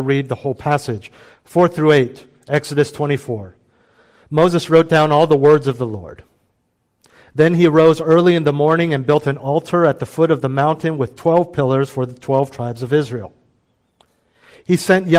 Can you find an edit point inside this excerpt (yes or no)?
no